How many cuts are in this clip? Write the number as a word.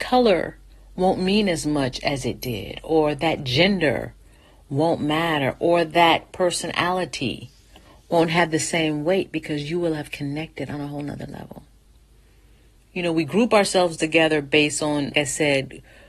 two